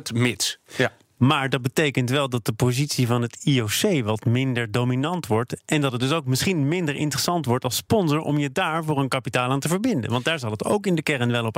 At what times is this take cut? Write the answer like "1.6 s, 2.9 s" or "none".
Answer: none

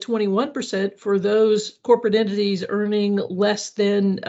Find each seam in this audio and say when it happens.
none

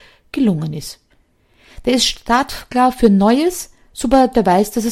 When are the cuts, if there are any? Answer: none

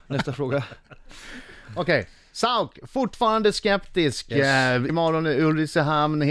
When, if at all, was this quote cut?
4.9 s

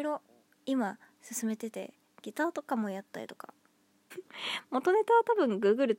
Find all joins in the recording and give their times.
4.1 s

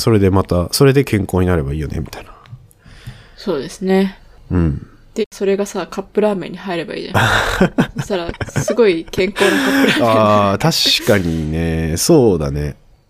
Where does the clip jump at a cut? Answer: 5.2 s

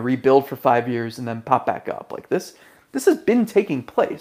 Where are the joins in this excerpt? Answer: none

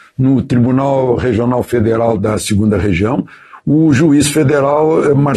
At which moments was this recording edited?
none

